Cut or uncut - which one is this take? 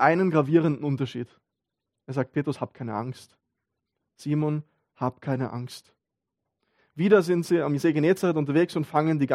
cut